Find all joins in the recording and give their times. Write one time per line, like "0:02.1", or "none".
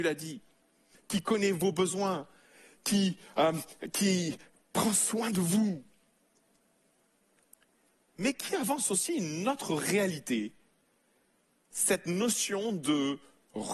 none